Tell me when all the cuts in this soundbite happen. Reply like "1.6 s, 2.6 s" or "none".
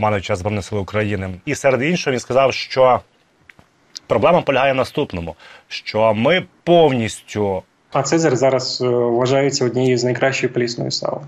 1.4 s, 7.9 s